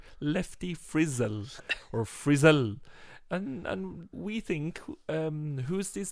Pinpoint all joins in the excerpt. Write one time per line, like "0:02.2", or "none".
0:04.1